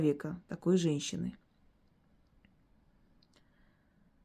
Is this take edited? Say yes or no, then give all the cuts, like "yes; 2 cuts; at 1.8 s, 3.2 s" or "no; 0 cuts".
no; 0 cuts